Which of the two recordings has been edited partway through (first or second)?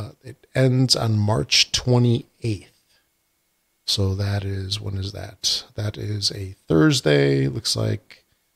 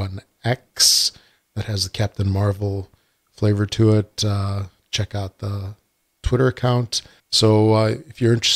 second